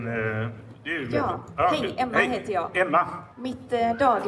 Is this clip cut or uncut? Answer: cut